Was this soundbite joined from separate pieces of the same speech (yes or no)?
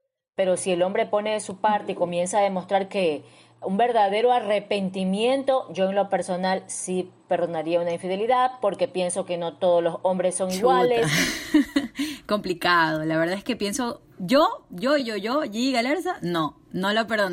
no